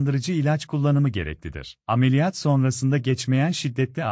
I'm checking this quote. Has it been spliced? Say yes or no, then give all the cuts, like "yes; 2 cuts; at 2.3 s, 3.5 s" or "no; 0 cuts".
yes; 1 cut; at 1.8 s